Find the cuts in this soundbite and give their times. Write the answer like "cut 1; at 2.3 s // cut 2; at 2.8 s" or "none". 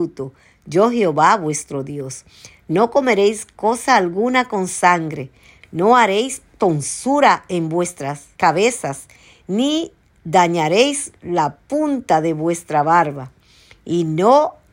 cut 1; at 5.6 s // cut 2; at 8.3 s